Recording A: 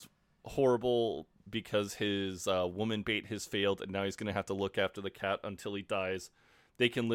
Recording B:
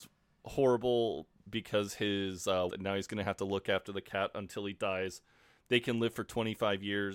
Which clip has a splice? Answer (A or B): B